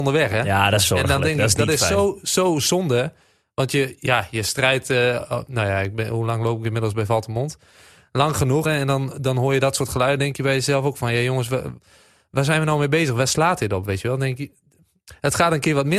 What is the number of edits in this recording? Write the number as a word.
one